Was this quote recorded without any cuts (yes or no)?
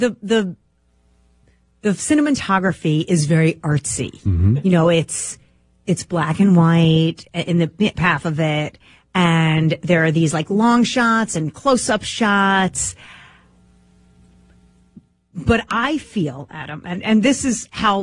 yes